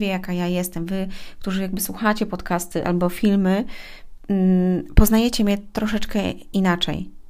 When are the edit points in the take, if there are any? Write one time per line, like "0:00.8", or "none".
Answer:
none